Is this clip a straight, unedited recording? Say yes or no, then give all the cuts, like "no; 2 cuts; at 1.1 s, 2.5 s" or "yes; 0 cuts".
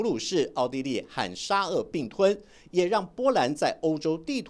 yes; 0 cuts